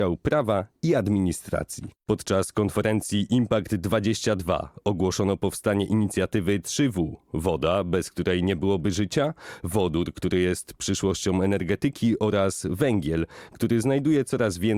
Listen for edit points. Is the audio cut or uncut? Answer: cut